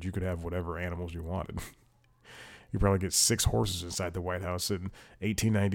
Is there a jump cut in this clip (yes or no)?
no